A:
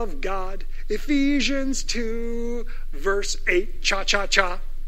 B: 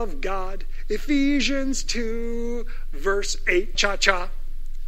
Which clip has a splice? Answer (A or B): B